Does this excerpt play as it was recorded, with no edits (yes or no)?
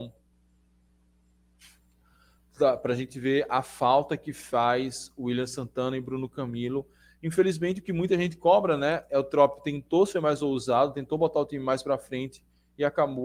yes